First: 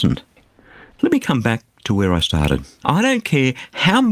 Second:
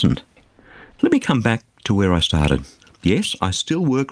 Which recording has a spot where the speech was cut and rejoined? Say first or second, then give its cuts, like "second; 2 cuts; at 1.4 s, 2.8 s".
first; 1 cut; at 2.8 s